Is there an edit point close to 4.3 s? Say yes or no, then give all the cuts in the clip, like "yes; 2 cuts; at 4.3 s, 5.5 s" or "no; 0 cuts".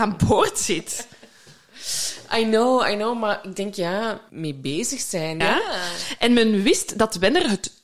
yes; 2 cuts; at 4.3 s, 5.4 s